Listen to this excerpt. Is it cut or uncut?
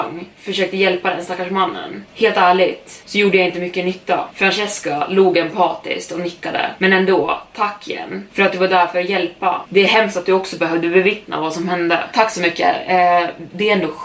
uncut